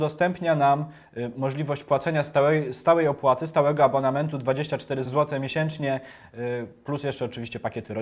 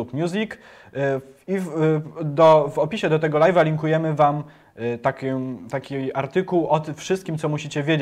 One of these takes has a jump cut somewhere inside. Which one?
first; 1 cut; at 5.0 s

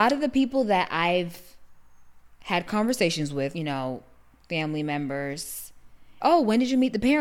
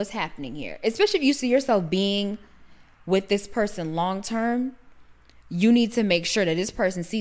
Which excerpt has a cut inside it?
first; 2 cuts; at 3.5 s, 6.2 s

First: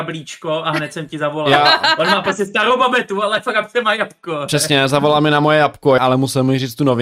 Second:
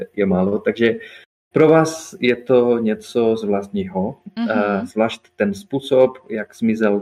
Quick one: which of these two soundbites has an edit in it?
first; 1 cut; at 6.0 s

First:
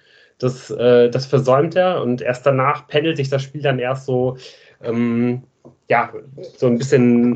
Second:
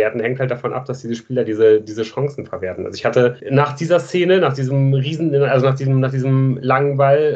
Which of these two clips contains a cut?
second; 1 cut; at 3.4 s

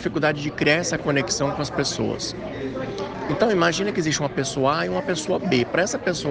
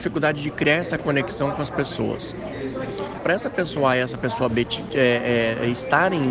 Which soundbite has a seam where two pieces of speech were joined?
second; 1 cut; at 3.2 s

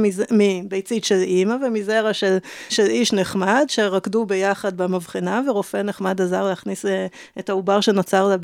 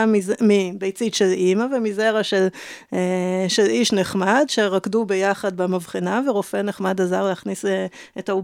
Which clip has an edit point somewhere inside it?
first; 1 cut; at 2.7 s

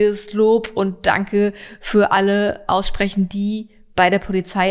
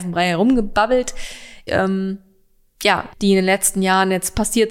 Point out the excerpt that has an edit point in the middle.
second; 2 cuts; at 1.7 s, 3.1 s

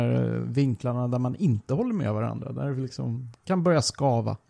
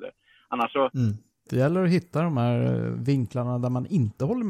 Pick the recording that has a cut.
second; 1 cut; at 1.5 s

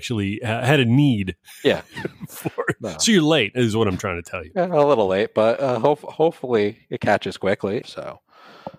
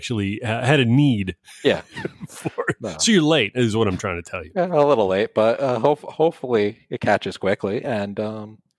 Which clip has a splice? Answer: first; 1 cut; at 7.8 s

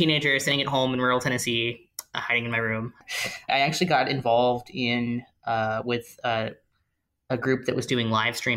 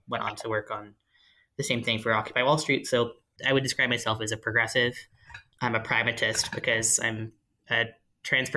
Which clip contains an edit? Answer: second; 2 cuts; at 3.4 s, 5.5 s

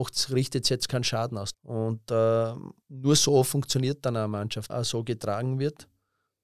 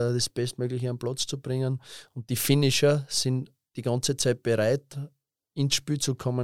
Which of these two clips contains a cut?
first; 3 cuts; at 1.5 s, 2.8 s, 4.7 s

